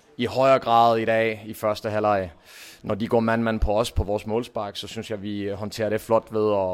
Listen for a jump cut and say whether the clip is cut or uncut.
uncut